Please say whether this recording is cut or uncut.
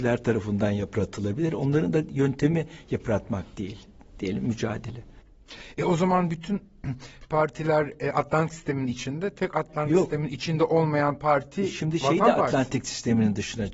uncut